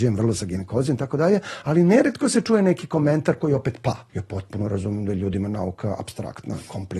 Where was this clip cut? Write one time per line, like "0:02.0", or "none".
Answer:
0:04.1